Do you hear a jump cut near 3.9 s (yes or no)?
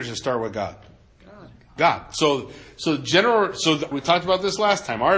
yes